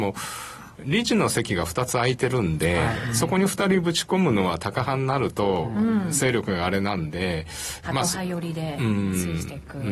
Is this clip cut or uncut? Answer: cut